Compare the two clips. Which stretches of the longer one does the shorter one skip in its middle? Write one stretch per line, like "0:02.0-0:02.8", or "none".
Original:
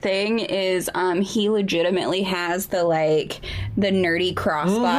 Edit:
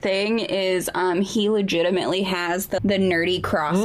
0:02.8-0:03.7